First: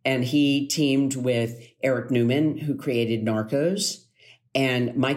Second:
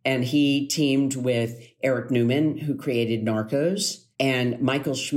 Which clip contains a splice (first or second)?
second